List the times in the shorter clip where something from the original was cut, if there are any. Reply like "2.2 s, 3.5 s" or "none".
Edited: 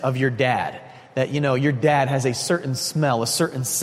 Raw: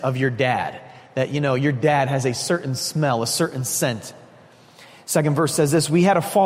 none